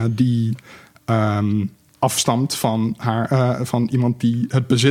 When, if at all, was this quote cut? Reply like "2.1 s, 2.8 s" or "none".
none